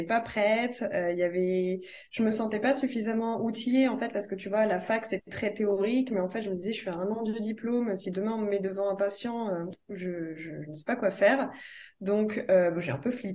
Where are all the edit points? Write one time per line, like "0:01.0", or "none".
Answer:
none